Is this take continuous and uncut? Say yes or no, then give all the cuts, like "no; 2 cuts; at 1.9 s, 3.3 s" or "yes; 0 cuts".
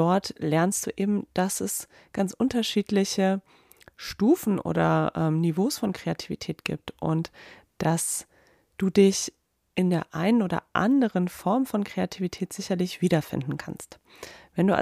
yes; 0 cuts